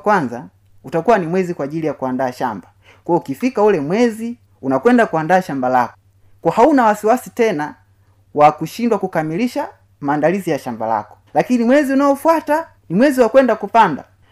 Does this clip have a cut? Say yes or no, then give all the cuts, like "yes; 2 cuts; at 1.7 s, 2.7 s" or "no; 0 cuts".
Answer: yes; 2 cuts; at 11.3 s, 12.8 s